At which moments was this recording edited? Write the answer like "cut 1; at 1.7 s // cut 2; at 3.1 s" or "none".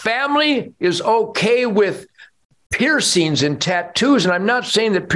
none